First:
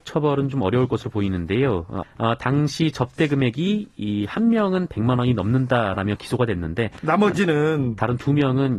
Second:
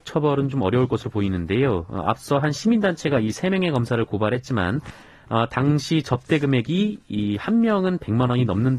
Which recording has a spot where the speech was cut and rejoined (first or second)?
first